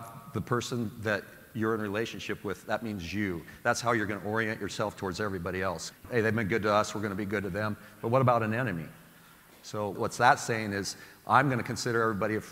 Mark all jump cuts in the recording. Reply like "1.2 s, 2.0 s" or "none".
5.9 s